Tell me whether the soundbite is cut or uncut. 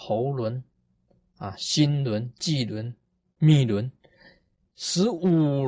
uncut